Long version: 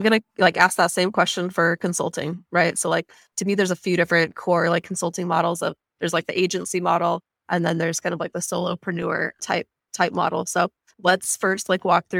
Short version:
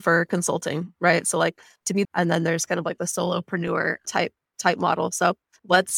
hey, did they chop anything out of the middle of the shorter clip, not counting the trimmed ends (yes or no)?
yes